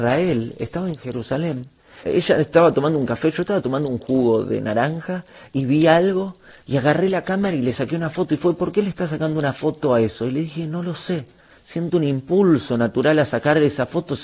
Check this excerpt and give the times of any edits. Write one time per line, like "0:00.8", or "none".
0:02.0